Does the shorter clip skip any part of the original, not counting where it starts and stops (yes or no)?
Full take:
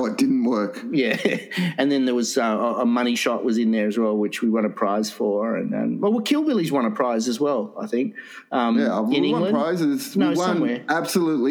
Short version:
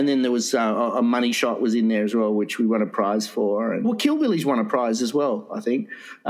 yes